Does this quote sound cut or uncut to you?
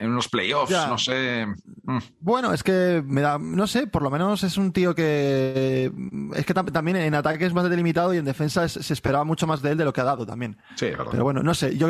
uncut